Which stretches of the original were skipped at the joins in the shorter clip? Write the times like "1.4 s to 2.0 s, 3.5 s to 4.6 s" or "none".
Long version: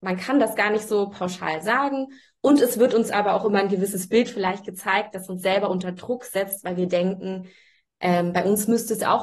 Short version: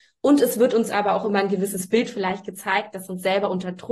none